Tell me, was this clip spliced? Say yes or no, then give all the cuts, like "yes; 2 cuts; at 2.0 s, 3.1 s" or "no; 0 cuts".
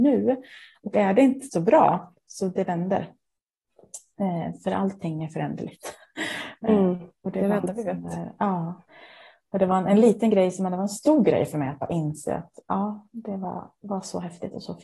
no; 0 cuts